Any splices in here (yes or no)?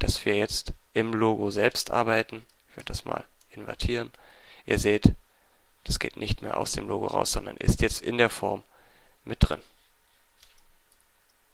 no